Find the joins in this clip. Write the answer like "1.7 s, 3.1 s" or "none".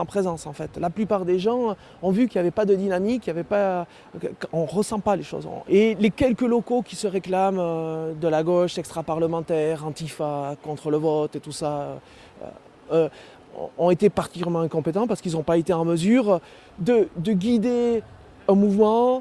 none